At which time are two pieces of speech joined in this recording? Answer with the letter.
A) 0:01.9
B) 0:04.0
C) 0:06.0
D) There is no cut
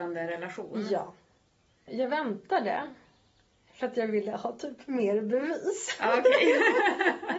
A